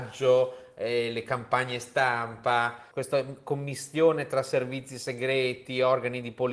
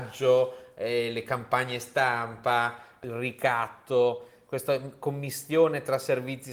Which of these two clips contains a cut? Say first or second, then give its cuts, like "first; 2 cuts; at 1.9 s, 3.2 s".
first; 1 cut; at 2.9 s